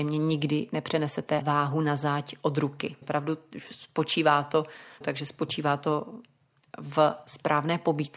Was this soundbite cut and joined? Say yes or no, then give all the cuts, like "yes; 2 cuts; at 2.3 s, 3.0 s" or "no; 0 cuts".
yes; 3 cuts; at 1.4 s, 3.0 s, 5.0 s